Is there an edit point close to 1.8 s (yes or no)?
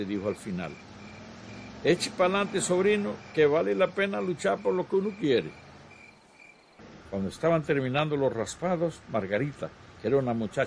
no